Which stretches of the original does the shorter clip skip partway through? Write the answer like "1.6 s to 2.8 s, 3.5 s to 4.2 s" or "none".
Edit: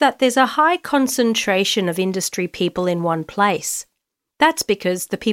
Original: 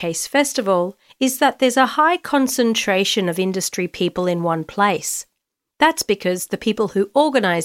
none